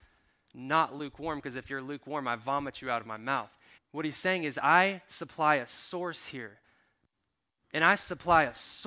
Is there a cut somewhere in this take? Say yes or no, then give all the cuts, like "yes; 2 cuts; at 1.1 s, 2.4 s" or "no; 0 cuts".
yes; 1 cut; at 3.8 s